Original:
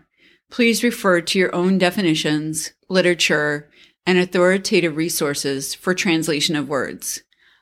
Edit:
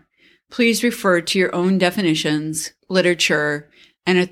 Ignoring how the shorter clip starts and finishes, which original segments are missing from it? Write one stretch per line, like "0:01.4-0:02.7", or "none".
none